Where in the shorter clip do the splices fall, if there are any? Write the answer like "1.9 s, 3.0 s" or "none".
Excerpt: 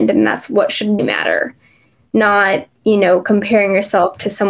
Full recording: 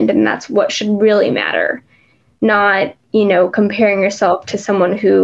1.0 s